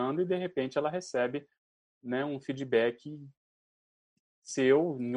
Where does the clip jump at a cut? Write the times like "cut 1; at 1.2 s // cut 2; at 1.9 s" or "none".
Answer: none